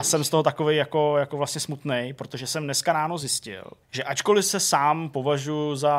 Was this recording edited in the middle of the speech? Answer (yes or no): yes